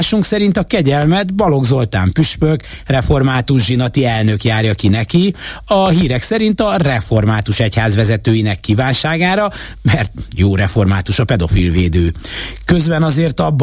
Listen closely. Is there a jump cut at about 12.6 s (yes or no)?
no